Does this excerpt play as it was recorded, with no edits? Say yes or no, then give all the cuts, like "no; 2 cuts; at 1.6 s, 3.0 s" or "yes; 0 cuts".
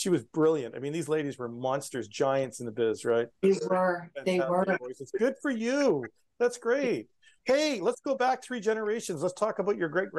yes; 0 cuts